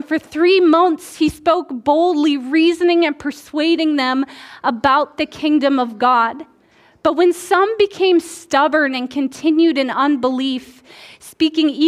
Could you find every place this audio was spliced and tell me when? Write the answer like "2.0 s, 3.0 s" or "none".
none

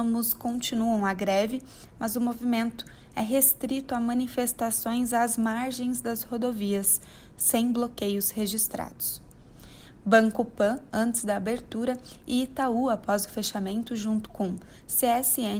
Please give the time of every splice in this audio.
10.0 s

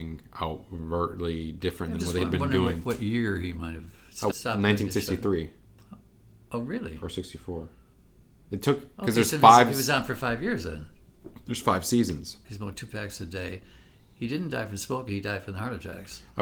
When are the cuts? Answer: 4.3 s, 12.4 s

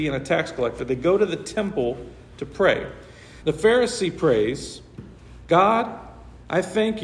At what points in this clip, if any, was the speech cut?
3.4 s

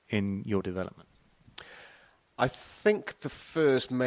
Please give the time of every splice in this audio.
none

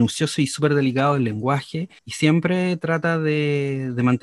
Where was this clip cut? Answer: 2.0 s

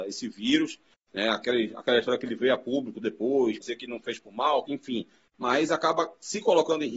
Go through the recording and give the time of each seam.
3.6 s, 4.7 s

